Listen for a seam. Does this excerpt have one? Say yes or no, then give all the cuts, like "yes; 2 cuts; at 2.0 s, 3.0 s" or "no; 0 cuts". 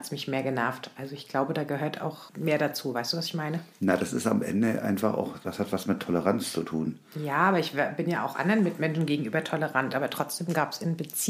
no; 0 cuts